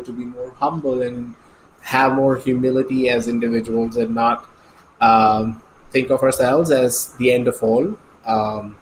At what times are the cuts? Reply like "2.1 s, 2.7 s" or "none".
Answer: none